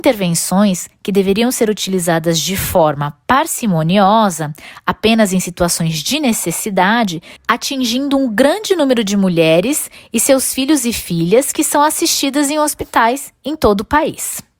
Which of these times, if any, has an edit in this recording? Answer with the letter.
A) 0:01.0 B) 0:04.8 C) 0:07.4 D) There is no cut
C